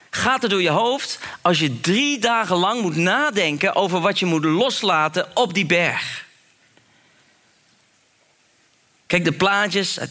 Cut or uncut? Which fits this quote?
uncut